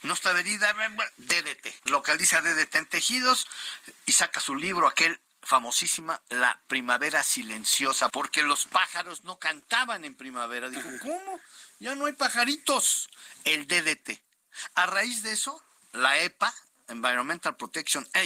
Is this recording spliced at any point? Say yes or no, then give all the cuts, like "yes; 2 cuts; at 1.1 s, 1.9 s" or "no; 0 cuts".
yes; 2 cuts; at 1.8 s, 8.1 s